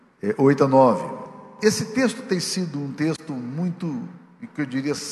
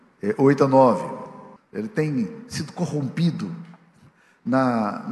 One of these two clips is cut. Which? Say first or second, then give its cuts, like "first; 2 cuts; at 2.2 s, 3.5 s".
second; 1 cut; at 1.6 s